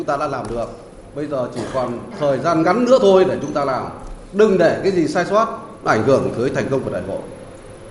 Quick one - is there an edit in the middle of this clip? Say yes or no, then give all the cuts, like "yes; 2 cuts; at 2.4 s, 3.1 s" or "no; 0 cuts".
no; 0 cuts